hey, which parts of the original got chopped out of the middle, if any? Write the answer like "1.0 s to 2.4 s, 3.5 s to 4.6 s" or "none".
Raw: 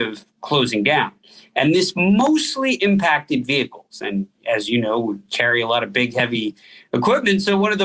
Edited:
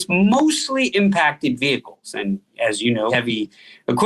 5.0 s to 6.1 s